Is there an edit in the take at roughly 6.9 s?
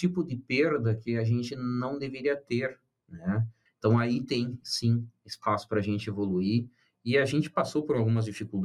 no; 1 cut; at 3.7 s

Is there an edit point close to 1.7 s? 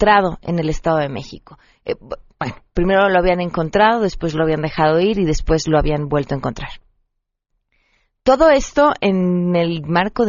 no; 0 cuts

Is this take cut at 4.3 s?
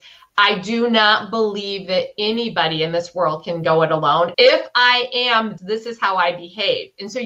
yes; 2 cuts; at 4.3 s, 5.6 s

